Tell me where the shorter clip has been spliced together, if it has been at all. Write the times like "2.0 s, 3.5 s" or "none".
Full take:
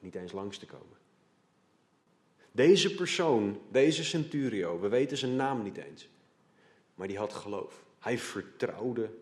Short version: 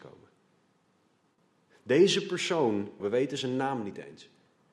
3.0 s